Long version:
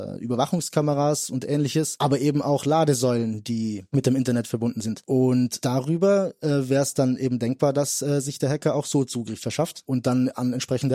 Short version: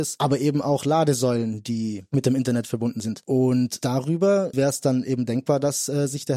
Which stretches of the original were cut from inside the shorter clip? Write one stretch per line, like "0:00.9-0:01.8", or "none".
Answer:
0:06.3-0:06.7